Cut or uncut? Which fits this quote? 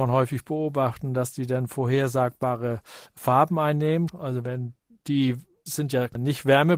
cut